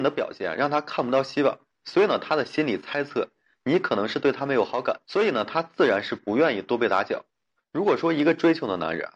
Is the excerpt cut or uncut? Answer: cut